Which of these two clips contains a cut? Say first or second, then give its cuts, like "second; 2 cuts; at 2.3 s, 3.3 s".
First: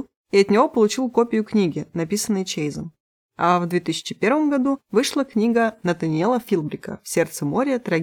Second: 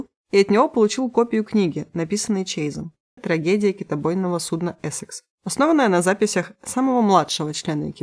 second; 2 cuts; at 3.2 s, 5.3 s